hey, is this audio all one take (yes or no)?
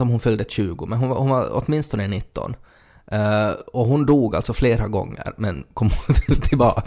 yes